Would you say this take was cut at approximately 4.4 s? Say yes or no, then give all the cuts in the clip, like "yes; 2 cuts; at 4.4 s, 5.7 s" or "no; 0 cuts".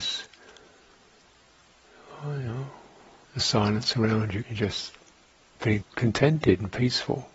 yes; 3 cuts; at 3.2 s, 4.4 s, 5.8 s